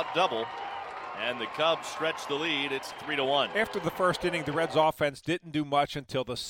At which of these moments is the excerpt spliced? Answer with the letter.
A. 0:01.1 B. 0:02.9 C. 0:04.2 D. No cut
B